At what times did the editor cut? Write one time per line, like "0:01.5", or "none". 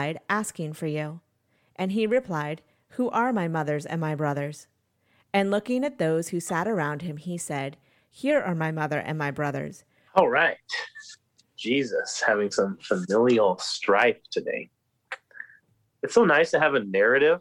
0:10.1